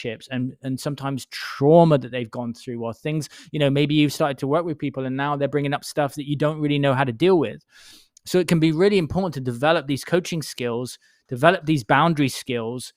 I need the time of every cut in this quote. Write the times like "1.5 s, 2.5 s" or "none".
none